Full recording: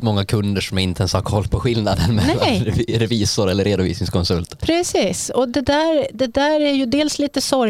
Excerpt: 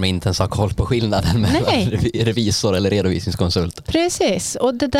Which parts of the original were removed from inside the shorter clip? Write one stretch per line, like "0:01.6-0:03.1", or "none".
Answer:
none